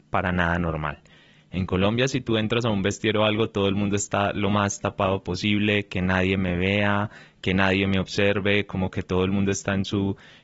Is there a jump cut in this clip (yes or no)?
no